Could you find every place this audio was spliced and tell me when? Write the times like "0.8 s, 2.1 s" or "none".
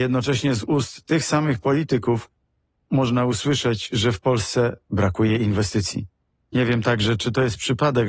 6.4 s